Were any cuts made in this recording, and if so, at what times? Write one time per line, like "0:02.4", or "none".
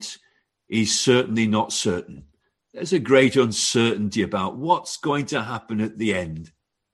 none